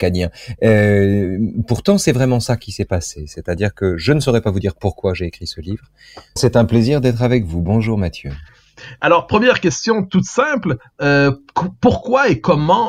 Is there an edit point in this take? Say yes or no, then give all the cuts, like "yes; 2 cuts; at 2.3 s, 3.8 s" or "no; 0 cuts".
yes; 1 cut; at 6.4 s